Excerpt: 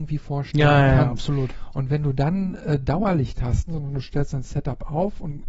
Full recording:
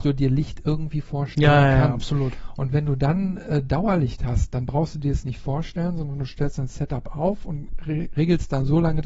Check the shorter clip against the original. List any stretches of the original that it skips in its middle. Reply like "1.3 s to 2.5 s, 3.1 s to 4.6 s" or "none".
4.5 s to 5.9 s